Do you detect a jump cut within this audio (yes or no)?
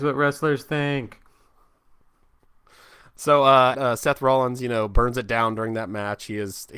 yes